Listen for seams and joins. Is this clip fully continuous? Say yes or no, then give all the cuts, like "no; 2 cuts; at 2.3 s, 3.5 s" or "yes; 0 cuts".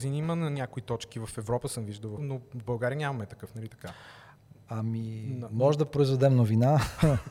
no; 1 cut; at 2.2 s